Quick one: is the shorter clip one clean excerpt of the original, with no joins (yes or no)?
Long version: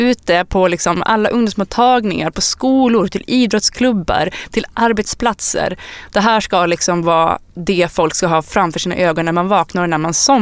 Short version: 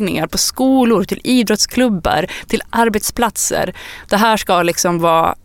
yes